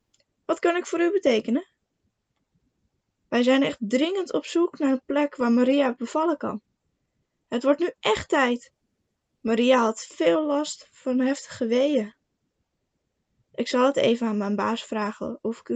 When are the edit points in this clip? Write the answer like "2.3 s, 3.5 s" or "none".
none